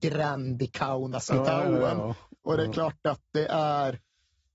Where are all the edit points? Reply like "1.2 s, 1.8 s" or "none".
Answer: none